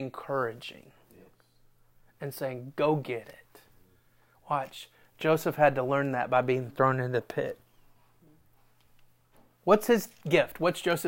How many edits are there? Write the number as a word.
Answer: zero